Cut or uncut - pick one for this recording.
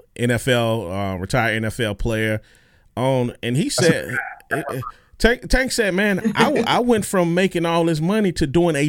uncut